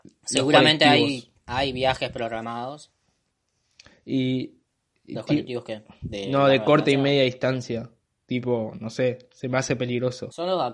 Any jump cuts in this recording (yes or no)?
no